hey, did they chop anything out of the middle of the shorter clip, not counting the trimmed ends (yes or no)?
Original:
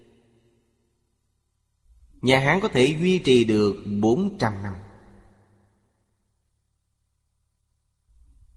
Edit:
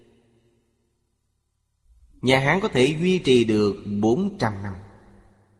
no